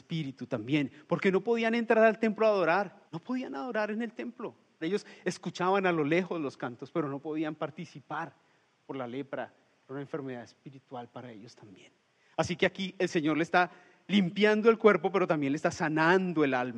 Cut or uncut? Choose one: cut